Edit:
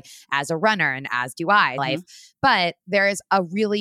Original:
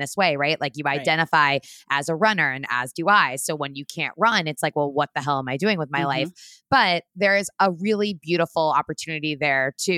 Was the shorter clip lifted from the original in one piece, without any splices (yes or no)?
no